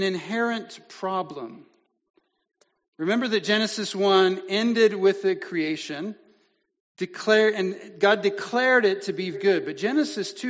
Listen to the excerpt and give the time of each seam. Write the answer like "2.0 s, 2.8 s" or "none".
9.3 s

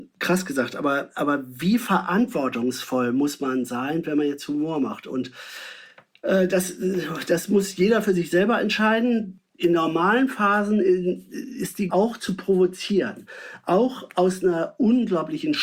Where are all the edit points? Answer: 11.9 s

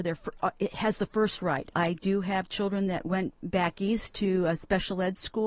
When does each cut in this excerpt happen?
1.7 s

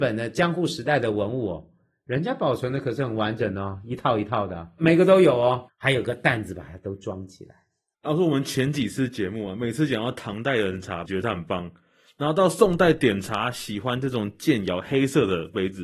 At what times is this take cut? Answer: 11.1 s

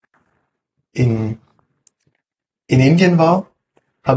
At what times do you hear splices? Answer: none

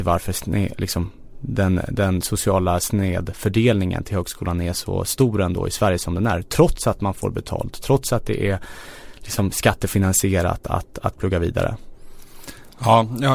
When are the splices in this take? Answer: none

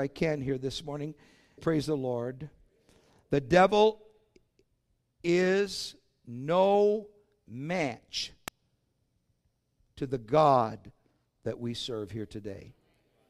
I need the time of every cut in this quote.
1.6 s

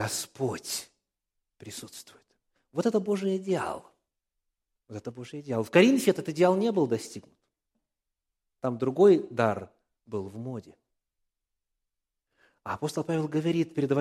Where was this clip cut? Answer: none

